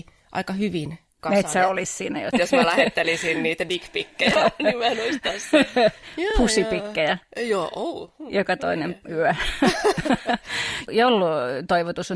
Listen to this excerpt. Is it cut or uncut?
uncut